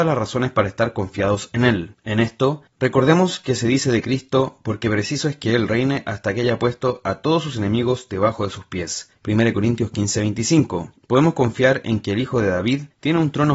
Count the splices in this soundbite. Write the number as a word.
zero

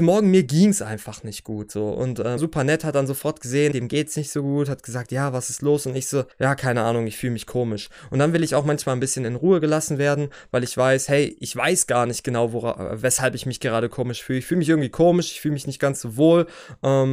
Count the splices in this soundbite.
three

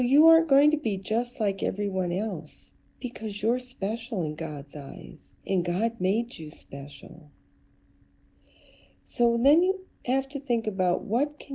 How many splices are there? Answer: one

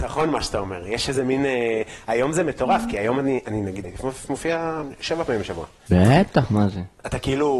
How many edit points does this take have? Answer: two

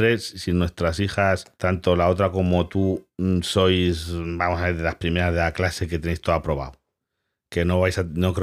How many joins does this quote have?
one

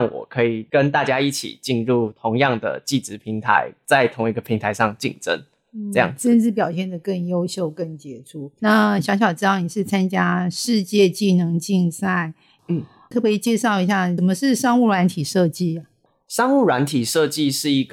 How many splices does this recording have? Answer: one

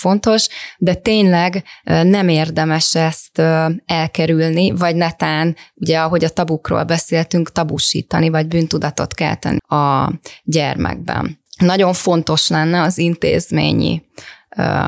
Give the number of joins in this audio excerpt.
two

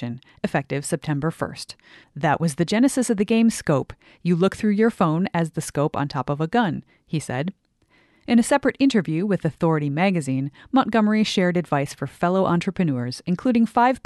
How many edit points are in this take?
one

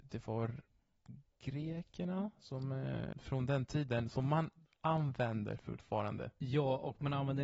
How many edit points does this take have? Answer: one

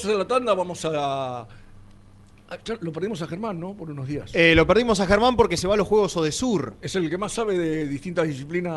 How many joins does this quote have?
zero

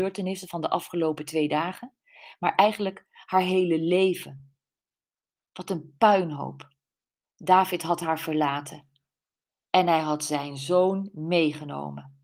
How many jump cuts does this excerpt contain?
one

